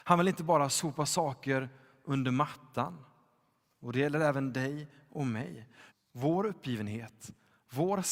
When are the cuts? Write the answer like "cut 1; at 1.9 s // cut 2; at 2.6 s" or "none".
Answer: cut 1; at 5.9 s

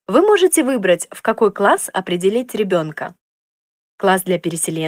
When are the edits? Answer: none

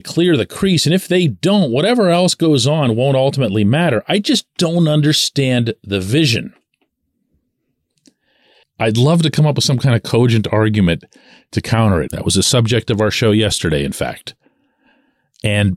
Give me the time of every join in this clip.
cut 1; at 8.6 s // cut 2; at 12.1 s

